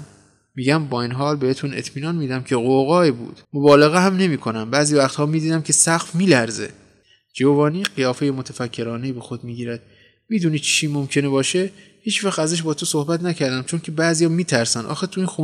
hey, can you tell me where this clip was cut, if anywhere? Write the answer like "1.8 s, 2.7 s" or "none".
3.4 s